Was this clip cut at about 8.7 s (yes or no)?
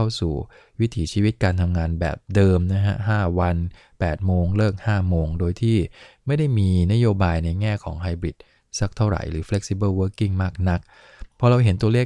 no